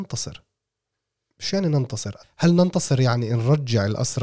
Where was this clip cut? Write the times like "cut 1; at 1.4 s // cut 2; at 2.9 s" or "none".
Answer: cut 1; at 2.2 s

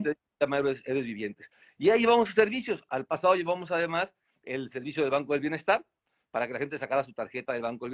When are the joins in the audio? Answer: none

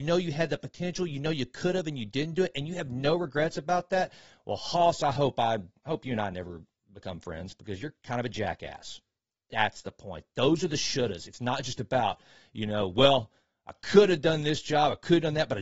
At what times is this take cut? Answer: none

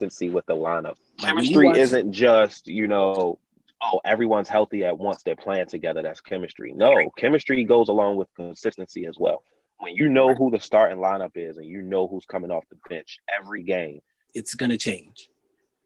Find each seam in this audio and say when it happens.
cut 1; at 1.0 s // cut 2; at 14.3 s

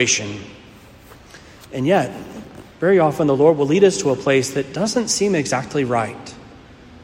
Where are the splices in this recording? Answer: none

